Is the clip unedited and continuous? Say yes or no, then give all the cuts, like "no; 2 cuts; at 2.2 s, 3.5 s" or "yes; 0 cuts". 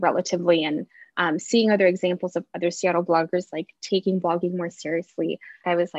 yes; 0 cuts